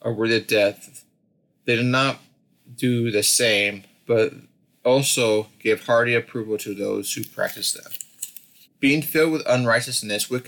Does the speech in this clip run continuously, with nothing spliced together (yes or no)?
no